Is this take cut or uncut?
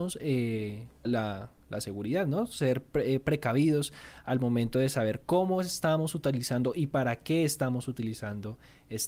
cut